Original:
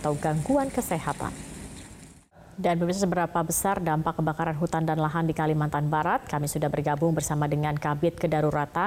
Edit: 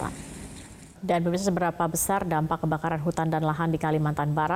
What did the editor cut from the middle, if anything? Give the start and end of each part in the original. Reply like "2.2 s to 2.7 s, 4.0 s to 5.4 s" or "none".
2.2 s to 2.5 s